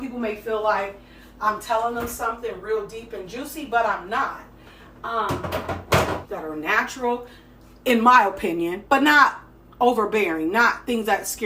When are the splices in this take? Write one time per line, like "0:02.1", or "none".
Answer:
0:06.2
0:08.9